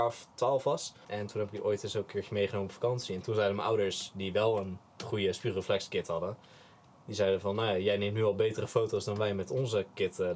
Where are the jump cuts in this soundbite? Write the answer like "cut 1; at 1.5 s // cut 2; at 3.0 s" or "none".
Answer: cut 1; at 1.0 s